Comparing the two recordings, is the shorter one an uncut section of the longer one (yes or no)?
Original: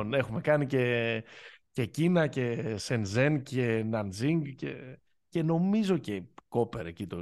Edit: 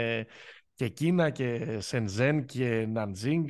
yes